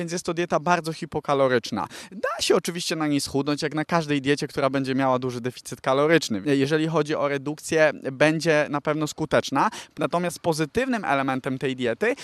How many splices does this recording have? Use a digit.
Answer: 2